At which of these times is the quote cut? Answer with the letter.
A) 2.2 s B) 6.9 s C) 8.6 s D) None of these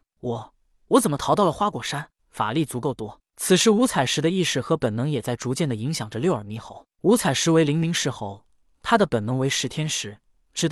A